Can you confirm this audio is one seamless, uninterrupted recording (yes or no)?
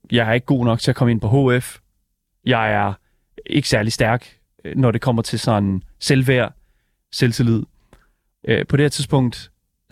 no